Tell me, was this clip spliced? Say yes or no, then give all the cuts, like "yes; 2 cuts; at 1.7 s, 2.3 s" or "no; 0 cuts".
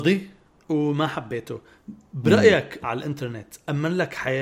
yes; 1 cut; at 2.8 s